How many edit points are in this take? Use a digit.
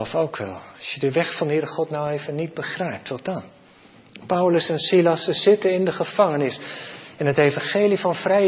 0